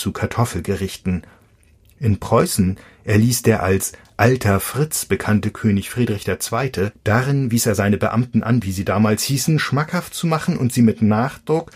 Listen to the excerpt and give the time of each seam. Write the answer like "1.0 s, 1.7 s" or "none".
6.9 s, 8.6 s

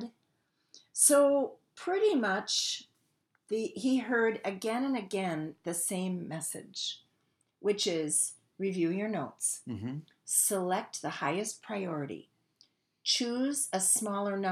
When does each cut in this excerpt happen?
none

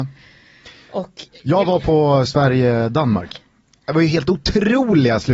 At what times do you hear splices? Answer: 3.3 s

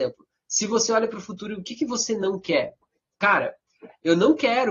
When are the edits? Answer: none

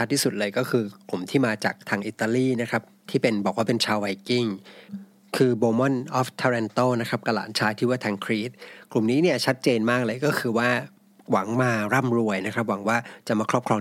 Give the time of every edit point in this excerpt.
none

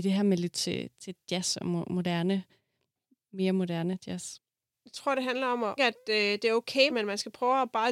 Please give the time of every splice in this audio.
4.7 s, 5.8 s, 6.9 s

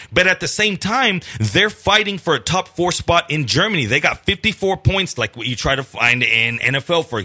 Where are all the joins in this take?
5.2 s

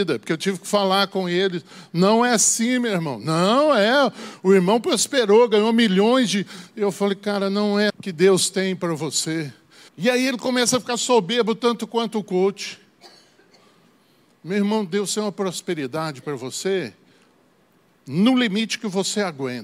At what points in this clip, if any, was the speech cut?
7.9 s, 9.9 s

